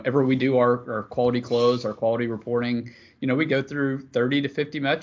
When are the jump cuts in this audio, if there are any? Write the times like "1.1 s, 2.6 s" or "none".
none